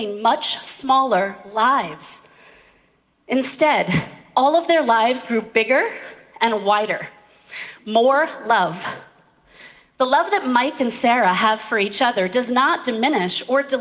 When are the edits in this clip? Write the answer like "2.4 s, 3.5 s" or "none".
none